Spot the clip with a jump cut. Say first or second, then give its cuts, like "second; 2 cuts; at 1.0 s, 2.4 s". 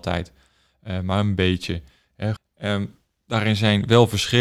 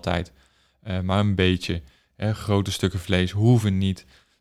first; 1 cut; at 2.4 s